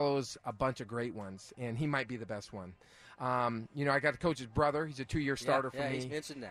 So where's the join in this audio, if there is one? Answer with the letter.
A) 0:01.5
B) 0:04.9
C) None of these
A